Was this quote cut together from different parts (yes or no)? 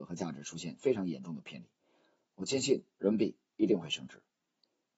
yes